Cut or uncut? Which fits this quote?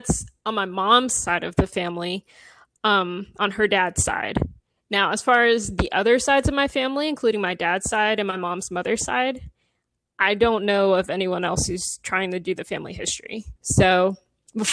cut